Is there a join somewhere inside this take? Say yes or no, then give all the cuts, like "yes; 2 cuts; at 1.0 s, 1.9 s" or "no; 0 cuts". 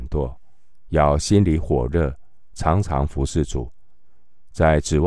no; 0 cuts